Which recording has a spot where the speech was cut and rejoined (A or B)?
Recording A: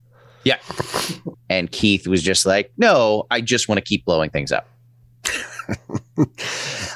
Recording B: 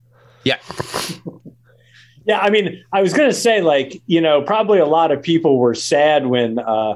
A